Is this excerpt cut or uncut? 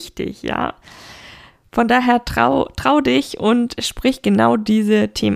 uncut